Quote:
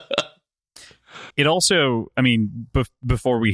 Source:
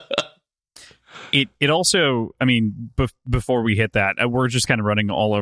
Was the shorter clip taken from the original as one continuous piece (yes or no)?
no